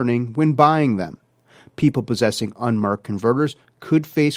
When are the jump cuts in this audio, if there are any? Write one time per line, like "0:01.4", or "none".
none